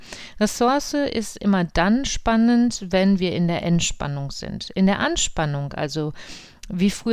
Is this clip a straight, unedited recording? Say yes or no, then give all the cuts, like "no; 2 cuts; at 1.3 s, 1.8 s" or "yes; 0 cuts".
yes; 0 cuts